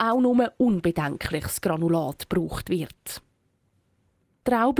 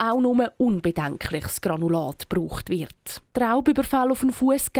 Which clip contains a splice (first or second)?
second